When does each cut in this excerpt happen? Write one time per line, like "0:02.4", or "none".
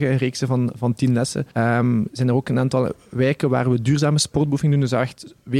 0:01.5